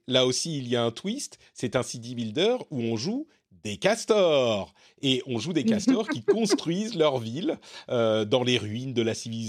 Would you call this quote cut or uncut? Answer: uncut